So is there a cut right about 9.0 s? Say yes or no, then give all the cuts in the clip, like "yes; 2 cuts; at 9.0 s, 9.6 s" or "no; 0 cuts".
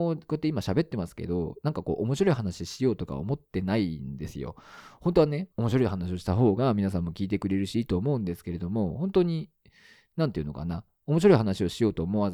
no; 1 cut; at 5.5 s